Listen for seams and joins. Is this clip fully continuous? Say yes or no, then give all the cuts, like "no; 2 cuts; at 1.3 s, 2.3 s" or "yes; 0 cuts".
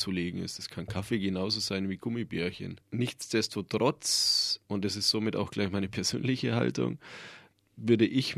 no; 2 cuts; at 2.8 s, 4.6 s